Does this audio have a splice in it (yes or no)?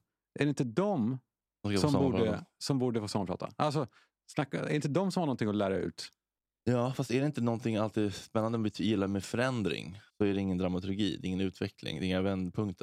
yes